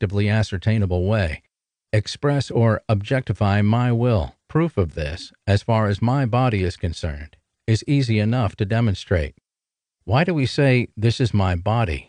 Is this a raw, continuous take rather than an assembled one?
no; 2 cuts; at 4.4 s, 10.0 s

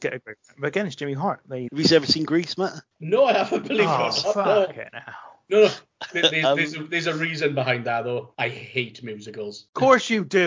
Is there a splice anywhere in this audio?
yes; 1 cut; at 1.7 s

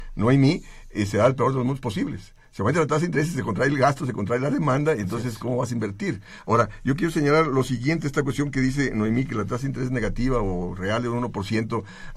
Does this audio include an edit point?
no; 0 cuts

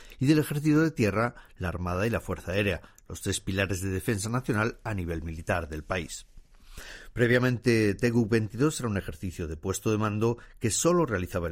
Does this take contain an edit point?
no; 0 cuts

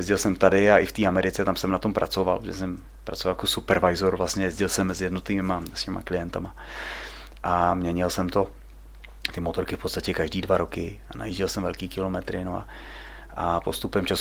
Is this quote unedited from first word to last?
yes; 0 cuts

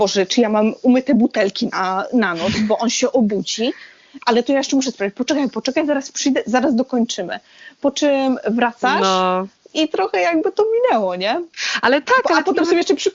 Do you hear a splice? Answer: no; 0 cuts

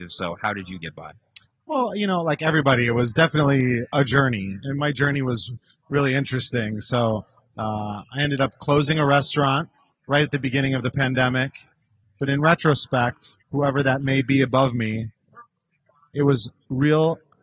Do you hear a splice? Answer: yes; 2 cuts; at 12.0 s, 13.4 s

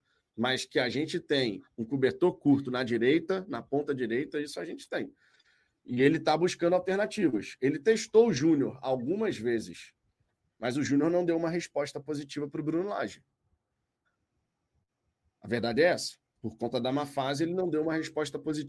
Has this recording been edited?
no; 0 cuts

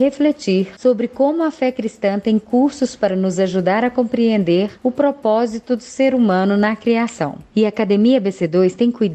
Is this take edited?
yes; 1 cut; at 7.5 s

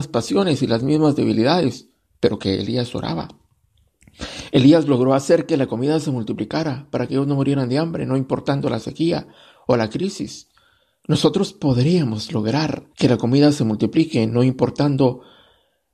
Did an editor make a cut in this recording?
yes; 1 cut; at 12.9 s

